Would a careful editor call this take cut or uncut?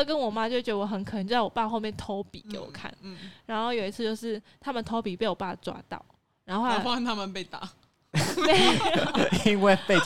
uncut